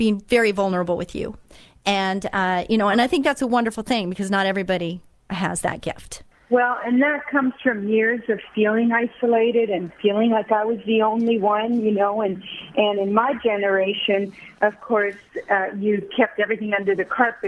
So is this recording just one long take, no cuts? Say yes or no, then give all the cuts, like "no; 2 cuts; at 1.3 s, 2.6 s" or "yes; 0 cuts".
no; 1 cut; at 6.3 s